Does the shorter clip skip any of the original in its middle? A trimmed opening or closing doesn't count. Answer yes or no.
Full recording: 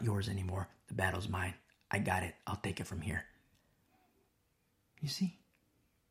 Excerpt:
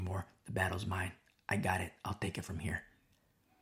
no